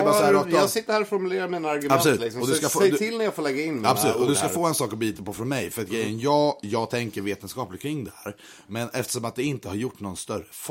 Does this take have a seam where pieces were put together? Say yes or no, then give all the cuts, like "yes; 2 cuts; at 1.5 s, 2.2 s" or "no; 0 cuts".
no; 0 cuts